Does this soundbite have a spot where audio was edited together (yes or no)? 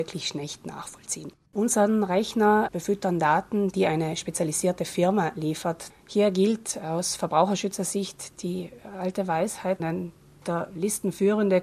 yes